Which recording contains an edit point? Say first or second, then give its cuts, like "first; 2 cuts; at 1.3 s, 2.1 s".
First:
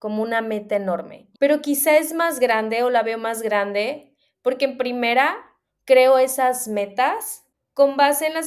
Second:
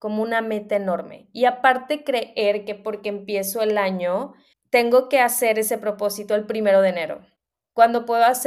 first; 1 cut; at 1.3 s